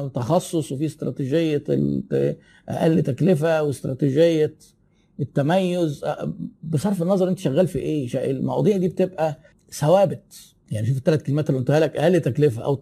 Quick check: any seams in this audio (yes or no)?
no